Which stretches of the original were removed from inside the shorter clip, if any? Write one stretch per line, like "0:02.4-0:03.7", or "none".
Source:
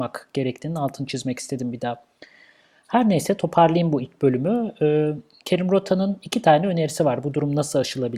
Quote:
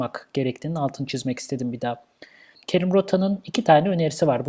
0:02.6-0:05.3